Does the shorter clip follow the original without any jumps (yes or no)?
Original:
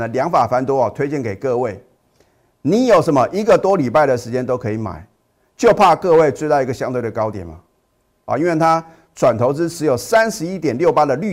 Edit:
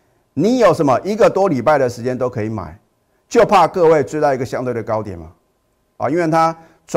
yes